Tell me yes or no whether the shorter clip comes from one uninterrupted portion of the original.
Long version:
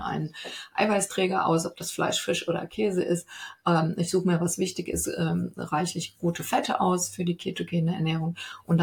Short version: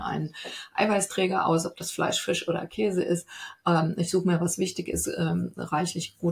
yes